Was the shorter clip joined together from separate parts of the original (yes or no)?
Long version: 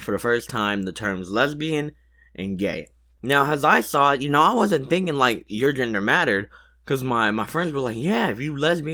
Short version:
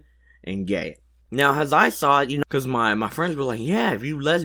yes